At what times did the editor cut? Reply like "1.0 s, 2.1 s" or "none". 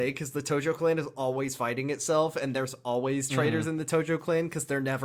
none